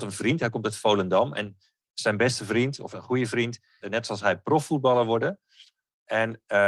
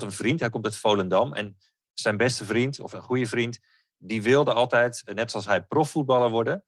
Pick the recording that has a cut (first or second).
first